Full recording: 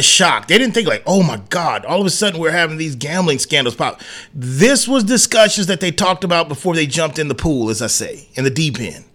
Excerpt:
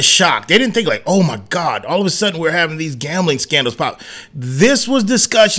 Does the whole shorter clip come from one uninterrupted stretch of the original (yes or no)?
yes